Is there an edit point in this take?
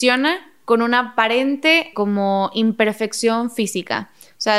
yes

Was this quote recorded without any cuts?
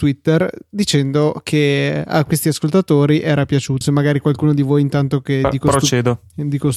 no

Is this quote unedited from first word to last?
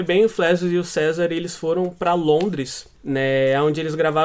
no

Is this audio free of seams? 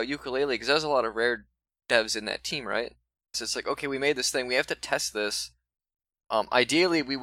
no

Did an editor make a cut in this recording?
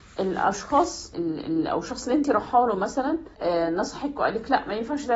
yes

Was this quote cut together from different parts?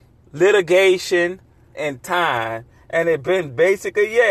yes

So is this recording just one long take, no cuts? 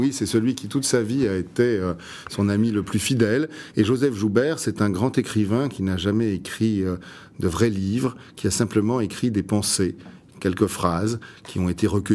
yes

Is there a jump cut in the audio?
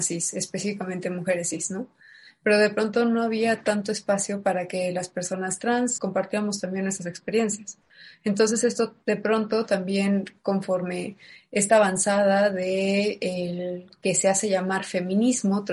yes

